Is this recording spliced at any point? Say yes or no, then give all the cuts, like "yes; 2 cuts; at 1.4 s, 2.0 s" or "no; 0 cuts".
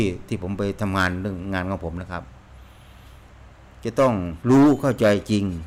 yes; 1 cut; at 4.4 s